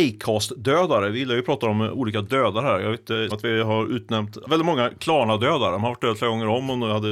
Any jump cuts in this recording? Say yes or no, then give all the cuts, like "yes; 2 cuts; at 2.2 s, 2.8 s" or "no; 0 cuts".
yes; 1 cut; at 3.3 s